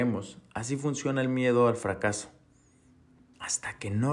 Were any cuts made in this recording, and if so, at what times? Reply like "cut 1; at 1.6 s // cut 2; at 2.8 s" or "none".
none